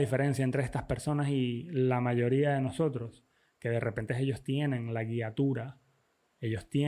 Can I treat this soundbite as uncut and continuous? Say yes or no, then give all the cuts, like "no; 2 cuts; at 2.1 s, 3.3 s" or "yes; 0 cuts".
yes; 0 cuts